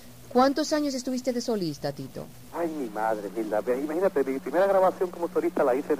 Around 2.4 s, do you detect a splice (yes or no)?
yes